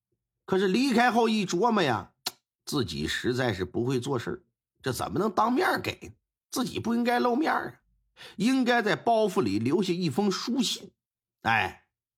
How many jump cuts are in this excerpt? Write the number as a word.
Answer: zero